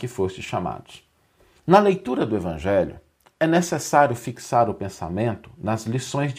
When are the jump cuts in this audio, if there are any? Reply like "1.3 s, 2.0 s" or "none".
1.6 s